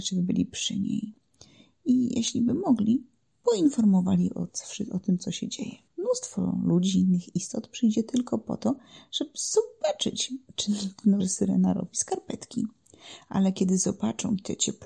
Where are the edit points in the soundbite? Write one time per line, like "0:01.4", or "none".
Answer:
0:05.9
0:11.2